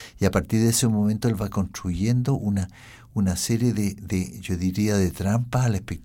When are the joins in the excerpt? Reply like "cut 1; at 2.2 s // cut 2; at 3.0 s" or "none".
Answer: none